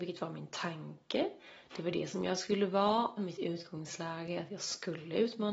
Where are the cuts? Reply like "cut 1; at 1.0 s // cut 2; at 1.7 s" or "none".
cut 1; at 3.2 s